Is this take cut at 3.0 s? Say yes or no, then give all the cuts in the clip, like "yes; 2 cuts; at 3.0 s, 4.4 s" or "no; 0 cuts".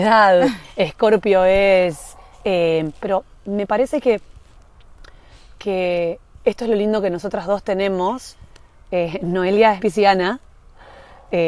yes; 2 cuts; at 3.0 s, 9.8 s